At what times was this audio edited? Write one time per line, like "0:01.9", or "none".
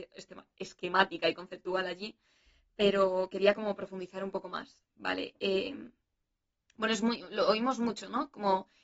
none